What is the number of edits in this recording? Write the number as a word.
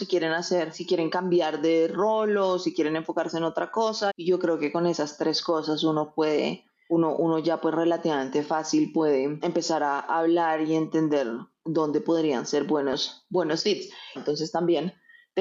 two